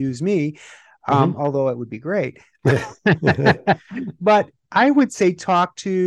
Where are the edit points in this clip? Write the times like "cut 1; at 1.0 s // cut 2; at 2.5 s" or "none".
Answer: none